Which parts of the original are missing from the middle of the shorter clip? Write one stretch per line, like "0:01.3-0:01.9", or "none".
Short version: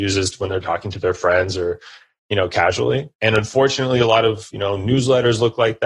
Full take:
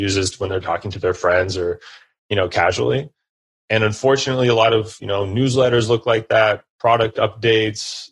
0:03.1-0:03.6